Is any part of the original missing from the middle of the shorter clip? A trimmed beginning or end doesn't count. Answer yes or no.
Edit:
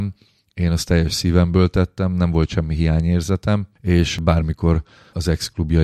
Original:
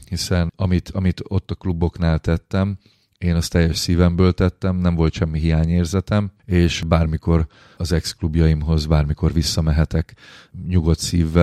no